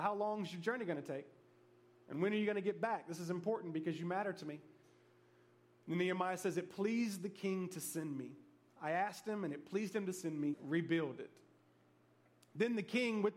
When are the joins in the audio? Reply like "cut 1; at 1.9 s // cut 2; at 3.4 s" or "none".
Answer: cut 1; at 10.5 s